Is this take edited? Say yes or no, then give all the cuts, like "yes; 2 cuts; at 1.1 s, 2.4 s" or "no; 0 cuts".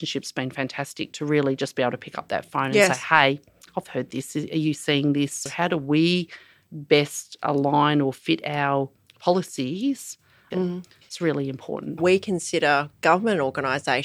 yes; 3 cuts; at 5.5 s, 10.5 s, 12.0 s